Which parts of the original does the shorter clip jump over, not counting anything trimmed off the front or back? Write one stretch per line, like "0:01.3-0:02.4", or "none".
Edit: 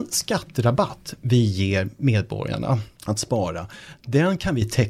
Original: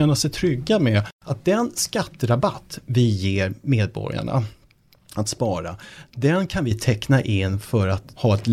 0:04.6-0:05.0